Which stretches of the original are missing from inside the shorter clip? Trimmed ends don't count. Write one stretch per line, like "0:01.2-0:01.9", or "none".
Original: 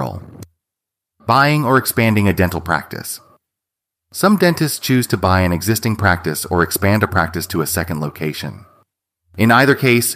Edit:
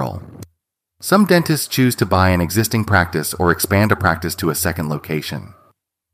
0:00.9-0:04.0